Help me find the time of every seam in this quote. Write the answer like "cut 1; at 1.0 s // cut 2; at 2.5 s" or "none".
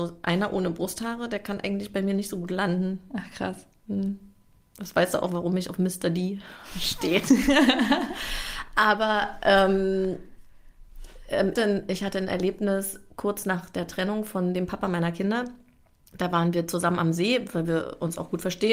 cut 1; at 11.6 s